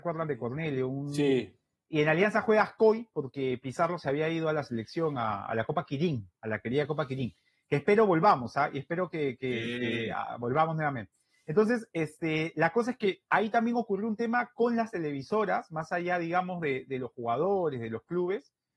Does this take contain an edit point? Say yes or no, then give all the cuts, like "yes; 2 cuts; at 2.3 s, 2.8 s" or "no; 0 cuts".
no; 0 cuts